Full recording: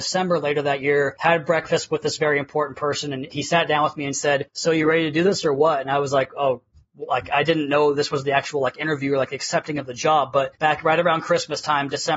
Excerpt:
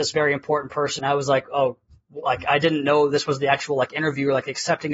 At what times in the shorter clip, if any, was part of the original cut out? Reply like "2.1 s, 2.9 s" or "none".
1.0 s